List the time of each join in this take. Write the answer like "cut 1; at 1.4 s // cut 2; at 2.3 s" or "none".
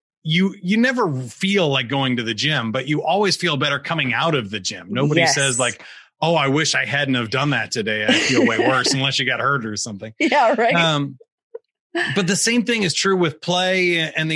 none